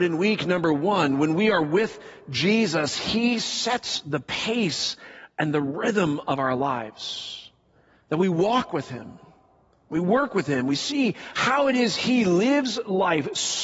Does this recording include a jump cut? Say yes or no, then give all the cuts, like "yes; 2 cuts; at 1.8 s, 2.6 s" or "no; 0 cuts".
no; 0 cuts